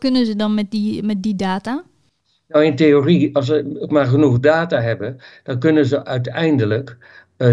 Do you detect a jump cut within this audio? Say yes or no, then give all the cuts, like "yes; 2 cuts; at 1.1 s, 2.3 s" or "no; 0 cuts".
no; 0 cuts